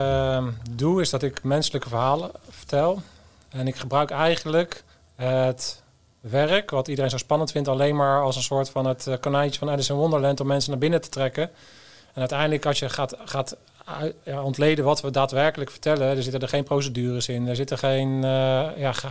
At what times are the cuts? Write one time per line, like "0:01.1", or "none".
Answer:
none